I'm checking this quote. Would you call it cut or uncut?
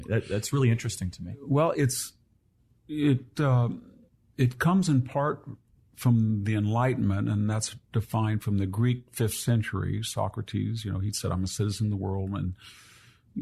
uncut